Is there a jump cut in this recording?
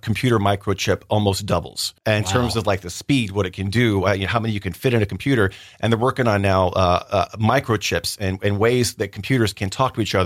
yes; 1 cut; at 2.0 s

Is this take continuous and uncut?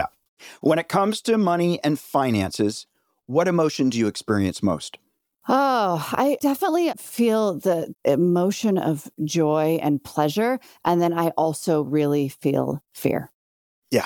yes; 0 cuts

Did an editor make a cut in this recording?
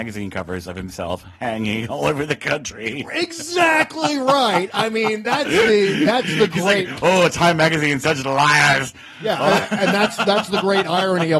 no; 0 cuts

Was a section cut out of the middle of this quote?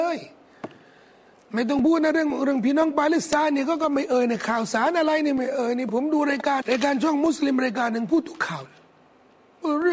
yes; 1 cut; at 6.6 s

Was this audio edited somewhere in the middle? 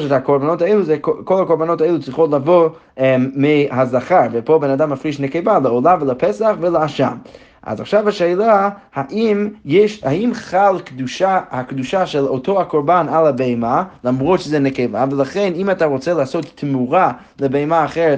no; 0 cuts

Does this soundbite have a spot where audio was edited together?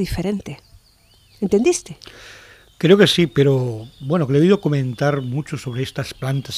no; 0 cuts

